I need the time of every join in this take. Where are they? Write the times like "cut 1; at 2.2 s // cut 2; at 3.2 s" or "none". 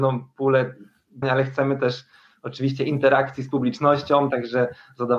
cut 1; at 1.2 s